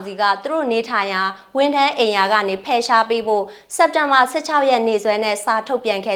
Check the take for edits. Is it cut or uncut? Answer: uncut